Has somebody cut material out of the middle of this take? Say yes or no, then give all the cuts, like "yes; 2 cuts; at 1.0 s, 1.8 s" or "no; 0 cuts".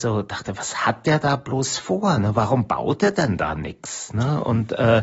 no; 0 cuts